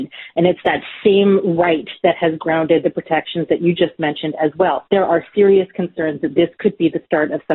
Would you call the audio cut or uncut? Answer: cut